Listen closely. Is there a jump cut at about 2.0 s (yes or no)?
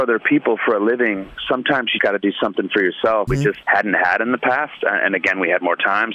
yes